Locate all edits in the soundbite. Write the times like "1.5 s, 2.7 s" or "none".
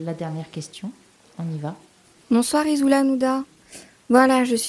none